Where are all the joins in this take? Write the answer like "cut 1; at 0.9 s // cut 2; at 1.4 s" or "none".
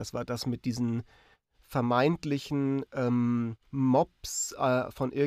cut 1; at 3.7 s